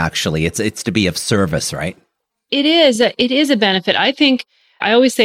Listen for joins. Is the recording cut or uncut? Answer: uncut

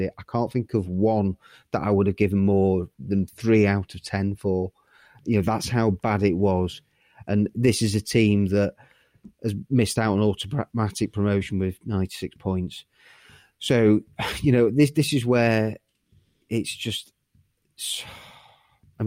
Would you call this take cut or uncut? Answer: cut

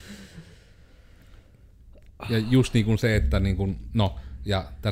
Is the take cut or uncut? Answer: uncut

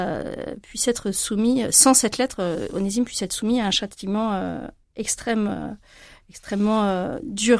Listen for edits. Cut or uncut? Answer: uncut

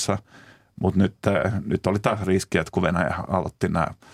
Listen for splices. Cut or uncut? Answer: uncut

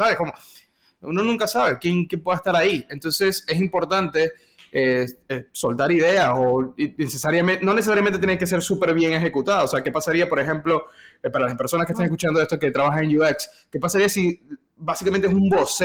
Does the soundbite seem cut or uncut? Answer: uncut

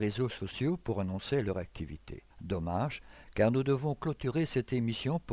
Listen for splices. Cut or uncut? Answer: cut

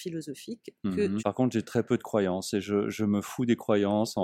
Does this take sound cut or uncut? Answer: cut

